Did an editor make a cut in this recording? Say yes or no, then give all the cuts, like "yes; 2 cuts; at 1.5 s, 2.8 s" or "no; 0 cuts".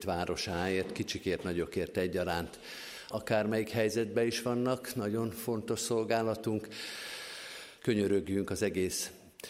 yes; 2 cuts; at 3.1 s, 7.8 s